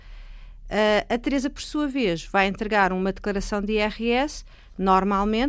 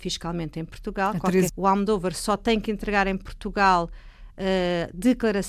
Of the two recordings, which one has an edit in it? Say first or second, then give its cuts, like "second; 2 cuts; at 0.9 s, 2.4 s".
second; 1 cut; at 1.5 s